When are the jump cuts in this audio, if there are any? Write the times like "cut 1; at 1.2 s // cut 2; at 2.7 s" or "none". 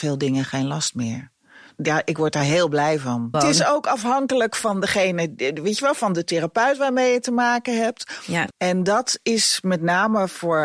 cut 1; at 3.3 s // cut 2; at 8.5 s